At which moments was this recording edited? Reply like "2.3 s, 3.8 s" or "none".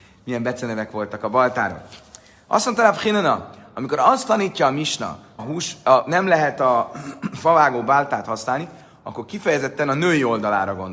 5.4 s